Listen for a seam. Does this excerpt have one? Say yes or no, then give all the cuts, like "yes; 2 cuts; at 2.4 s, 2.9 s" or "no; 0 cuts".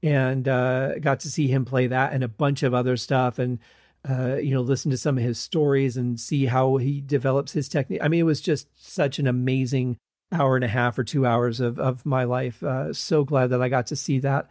no; 0 cuts